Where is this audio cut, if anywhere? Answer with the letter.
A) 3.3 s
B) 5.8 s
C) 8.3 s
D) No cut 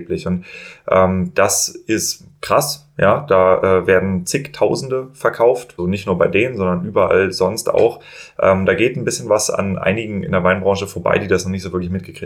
B